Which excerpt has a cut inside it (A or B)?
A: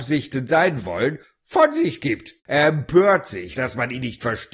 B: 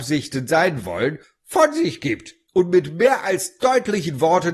A